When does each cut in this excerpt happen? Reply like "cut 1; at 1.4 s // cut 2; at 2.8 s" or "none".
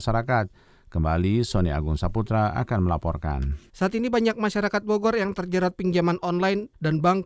cut 1; at 3.7 s